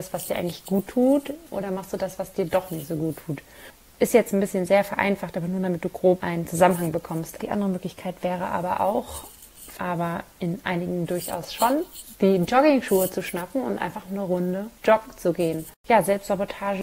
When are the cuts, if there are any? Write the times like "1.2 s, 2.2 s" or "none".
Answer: 7.4 s, 9.7 s